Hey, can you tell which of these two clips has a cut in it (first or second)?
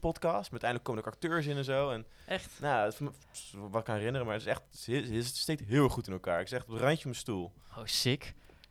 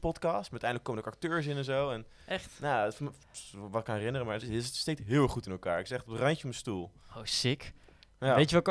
second